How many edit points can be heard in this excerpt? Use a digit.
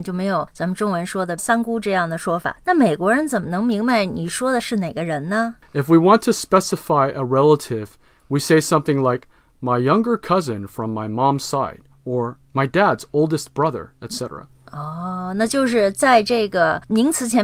1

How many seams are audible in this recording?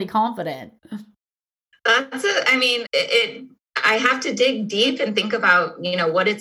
1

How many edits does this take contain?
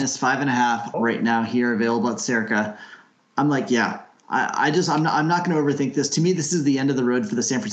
1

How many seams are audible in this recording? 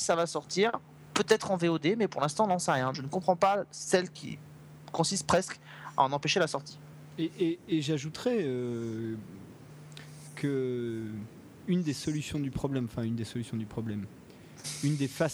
1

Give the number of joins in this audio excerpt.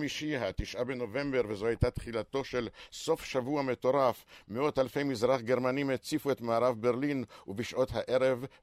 0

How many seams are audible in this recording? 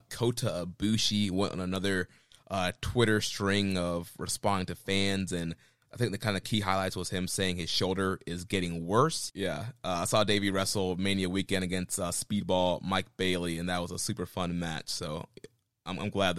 1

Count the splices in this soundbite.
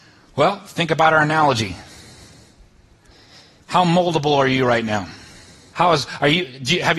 1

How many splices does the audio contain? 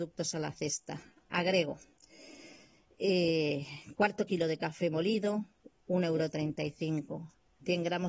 0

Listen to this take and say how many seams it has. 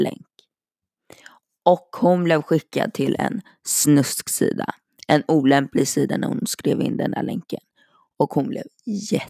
0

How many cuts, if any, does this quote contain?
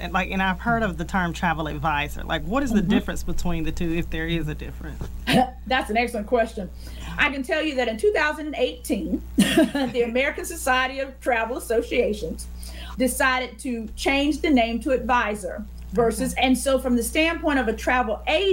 2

